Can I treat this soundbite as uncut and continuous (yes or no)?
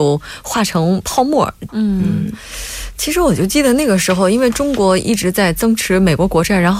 no